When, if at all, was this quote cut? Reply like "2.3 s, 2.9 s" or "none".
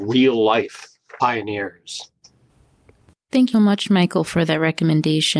3.5 s